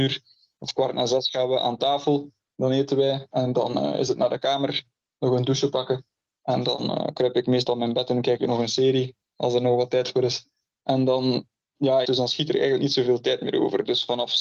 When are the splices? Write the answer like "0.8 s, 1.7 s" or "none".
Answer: 10.7 s, 12.0 s